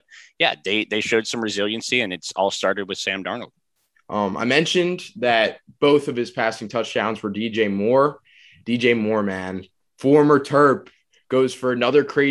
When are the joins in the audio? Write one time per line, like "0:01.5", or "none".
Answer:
0:03.9